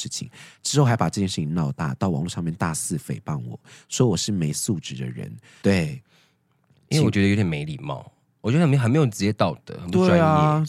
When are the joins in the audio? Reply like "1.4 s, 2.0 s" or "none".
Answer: 5.6 s